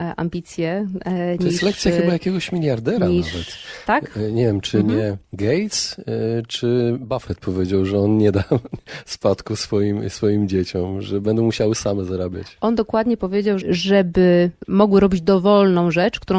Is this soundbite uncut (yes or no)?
no